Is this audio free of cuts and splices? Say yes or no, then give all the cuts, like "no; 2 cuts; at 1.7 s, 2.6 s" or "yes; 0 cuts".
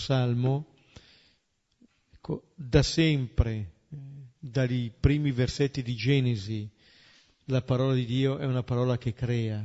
yes; 0 cuts